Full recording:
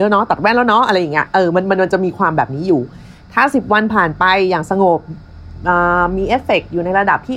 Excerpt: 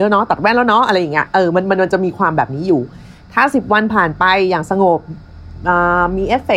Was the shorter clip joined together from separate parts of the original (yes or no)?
no